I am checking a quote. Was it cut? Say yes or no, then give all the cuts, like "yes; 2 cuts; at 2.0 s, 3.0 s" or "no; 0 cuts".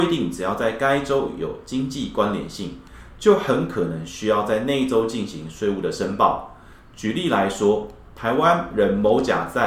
no; 0 cuts